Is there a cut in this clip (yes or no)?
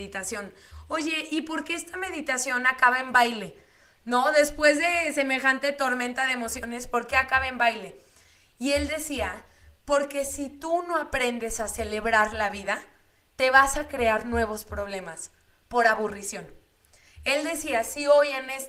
no